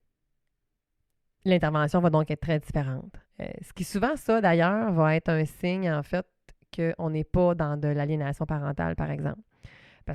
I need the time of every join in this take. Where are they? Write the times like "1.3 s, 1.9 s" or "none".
3.3 s